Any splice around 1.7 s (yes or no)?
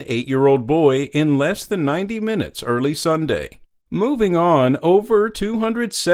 no